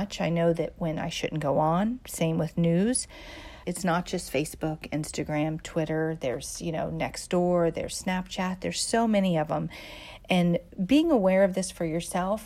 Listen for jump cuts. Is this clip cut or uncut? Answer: cut